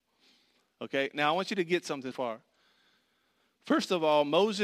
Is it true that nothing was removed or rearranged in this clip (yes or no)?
no